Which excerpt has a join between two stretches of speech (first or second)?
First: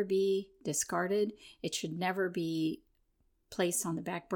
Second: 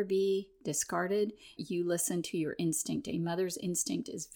second